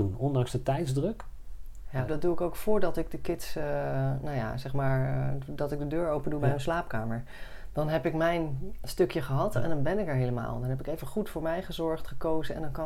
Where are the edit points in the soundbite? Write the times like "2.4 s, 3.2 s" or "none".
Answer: 2.1 s